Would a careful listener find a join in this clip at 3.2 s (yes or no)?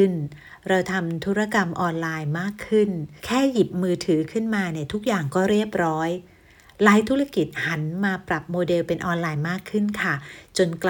yes